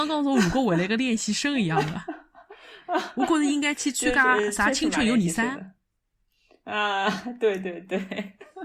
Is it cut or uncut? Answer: uncut